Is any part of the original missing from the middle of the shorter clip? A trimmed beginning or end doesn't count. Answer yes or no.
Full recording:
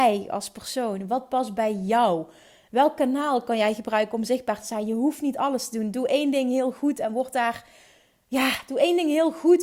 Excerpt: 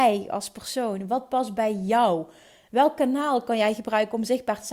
no